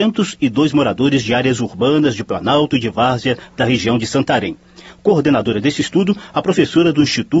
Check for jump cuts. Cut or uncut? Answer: uncut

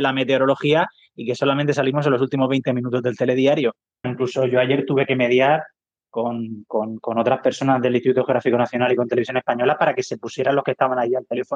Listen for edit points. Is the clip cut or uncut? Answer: cut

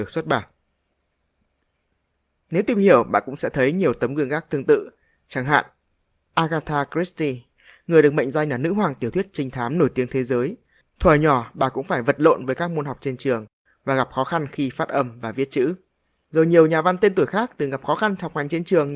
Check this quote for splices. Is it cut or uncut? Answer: uncut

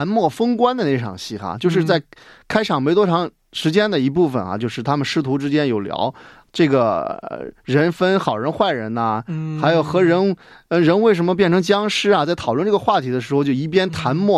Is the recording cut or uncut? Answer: uncut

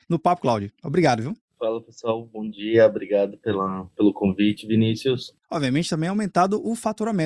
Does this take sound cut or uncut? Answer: cut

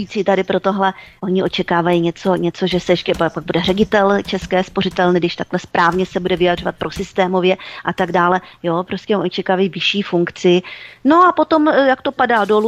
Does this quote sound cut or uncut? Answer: uncut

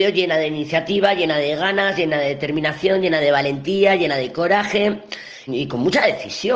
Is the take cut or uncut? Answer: cut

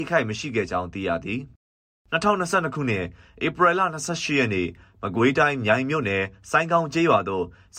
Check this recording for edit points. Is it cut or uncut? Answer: uncut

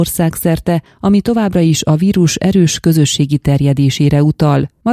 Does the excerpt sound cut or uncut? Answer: uncut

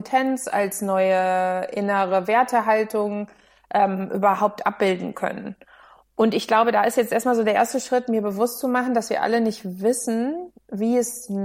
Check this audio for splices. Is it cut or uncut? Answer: uncut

